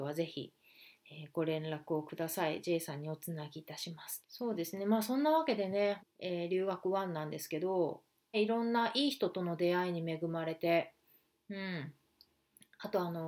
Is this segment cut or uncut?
cut